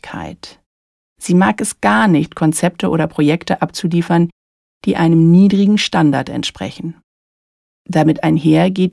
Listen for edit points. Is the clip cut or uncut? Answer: uncut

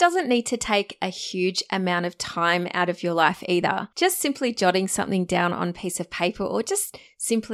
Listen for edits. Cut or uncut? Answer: cut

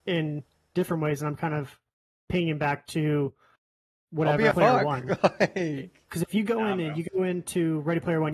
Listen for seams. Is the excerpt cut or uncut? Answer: cut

